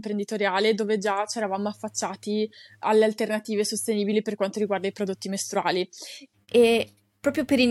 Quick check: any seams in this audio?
yes; 1 cut; at 6.3 s

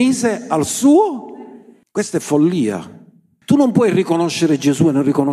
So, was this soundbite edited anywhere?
yes; 2 cuts; at 1.8 s, 3.4 s

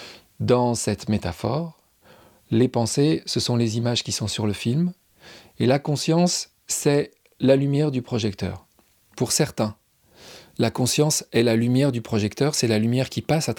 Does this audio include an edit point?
yes; 1 cut; at 9.1 s

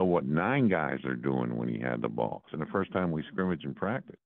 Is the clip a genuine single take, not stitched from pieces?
no; 1 cut; at 2.5 s

